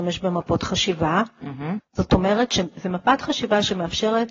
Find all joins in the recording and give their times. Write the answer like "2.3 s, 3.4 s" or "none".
1.8 s